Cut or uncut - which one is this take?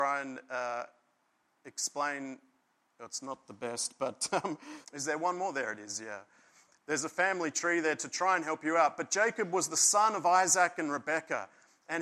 cut